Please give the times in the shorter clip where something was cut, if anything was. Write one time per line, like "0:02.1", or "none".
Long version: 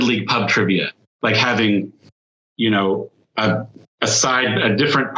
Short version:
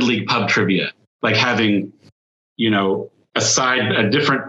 0:03.3